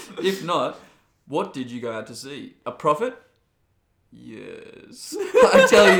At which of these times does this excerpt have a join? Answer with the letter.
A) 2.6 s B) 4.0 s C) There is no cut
A